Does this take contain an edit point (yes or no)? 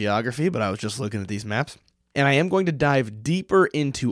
yes